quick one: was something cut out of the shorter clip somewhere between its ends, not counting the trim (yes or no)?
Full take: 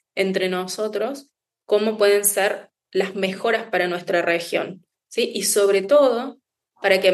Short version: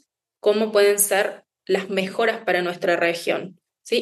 no